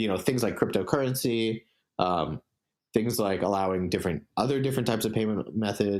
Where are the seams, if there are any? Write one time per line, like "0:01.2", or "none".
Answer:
none